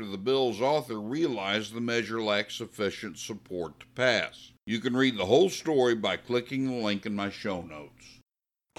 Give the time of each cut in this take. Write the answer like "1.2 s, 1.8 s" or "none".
4.6 s